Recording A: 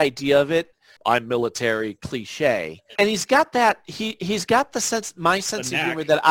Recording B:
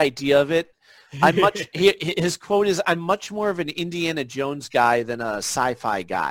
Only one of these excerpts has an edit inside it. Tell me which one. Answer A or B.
A